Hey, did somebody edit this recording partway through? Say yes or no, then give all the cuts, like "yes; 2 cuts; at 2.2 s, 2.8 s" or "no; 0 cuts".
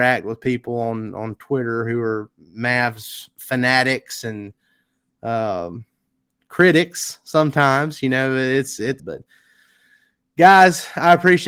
yes; 1 cut; at 9.0 s